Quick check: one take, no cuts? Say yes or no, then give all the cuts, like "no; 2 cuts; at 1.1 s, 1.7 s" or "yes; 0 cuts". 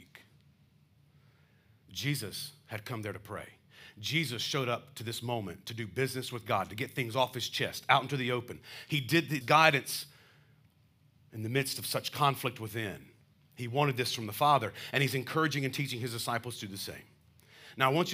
no; 1 cut; at 9.4 s